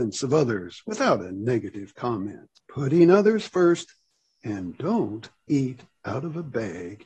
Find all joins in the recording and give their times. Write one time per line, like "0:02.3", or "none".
none